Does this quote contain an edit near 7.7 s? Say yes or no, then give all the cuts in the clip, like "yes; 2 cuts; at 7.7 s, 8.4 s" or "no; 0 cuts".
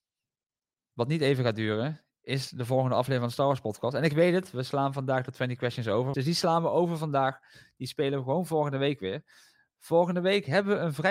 no; 1 cut; at 6.1 s